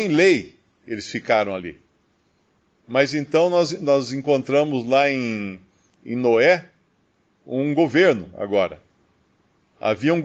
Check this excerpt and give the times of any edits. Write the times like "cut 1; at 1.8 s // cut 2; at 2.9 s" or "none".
none